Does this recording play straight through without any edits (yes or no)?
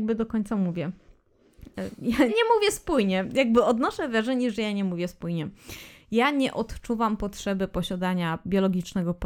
no